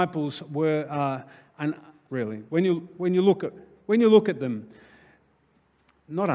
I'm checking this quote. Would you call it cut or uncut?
cut